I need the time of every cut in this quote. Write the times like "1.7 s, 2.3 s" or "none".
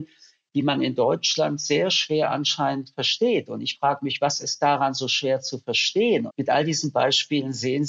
6.3 s